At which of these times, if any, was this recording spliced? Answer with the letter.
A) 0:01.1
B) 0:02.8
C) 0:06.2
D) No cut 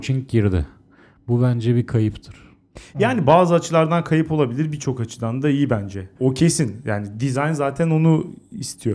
C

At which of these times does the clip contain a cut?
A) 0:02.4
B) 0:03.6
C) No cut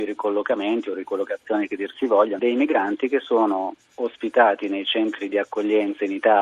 A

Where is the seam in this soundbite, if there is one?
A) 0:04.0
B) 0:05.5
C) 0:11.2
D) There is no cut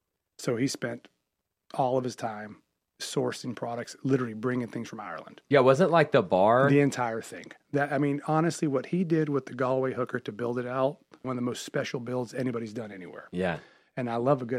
C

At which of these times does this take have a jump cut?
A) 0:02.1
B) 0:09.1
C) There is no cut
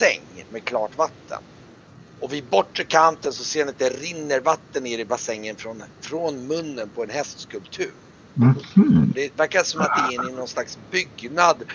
B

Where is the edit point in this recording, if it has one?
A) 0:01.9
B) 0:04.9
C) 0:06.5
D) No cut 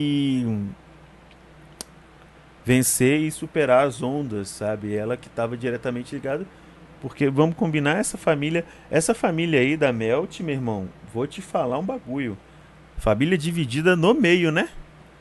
D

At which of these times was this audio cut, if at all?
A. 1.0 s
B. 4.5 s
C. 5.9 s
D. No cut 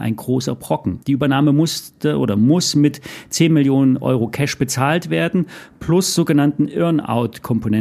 A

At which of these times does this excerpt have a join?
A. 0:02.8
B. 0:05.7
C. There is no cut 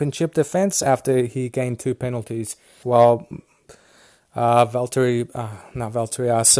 A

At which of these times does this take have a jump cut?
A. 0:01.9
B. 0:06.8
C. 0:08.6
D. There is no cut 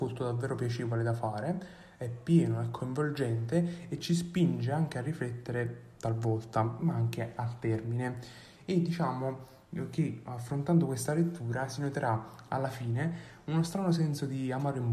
B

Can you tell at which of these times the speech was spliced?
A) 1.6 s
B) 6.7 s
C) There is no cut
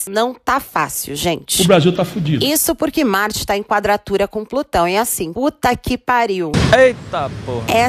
C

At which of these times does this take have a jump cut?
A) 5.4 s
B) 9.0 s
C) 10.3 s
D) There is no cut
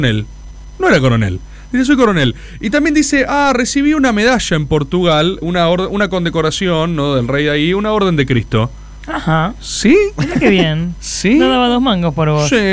A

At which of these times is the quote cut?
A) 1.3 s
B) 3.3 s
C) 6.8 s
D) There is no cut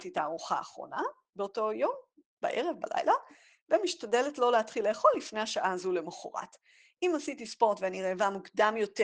D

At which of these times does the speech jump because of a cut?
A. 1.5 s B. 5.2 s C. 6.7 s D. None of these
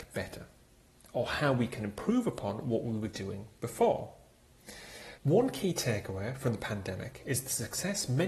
B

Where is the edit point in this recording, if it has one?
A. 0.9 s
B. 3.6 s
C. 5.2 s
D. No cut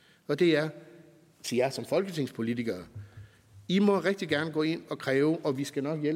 D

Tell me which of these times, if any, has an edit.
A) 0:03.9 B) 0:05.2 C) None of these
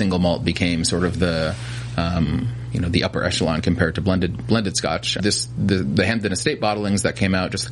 B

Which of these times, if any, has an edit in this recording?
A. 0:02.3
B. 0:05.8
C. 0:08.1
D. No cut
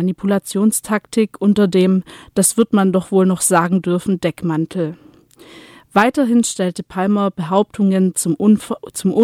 D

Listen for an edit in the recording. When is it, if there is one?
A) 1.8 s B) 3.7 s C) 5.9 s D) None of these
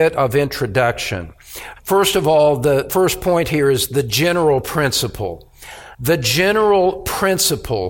D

